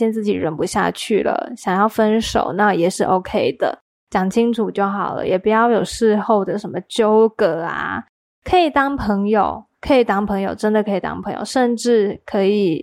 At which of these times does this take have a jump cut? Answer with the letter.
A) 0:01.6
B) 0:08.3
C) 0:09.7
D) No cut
C